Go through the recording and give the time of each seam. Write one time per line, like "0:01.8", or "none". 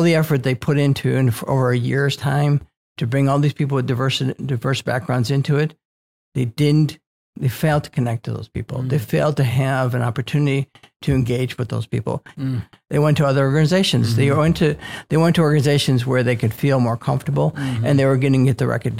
0:12.3